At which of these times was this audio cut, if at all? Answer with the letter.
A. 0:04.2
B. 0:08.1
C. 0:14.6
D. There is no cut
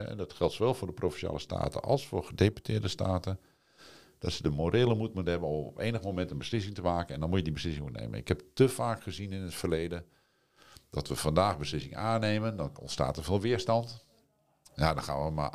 D